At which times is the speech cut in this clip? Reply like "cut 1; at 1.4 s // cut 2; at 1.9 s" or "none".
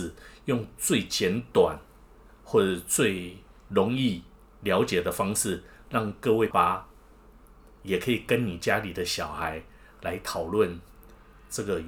cut 1; at 6.5 s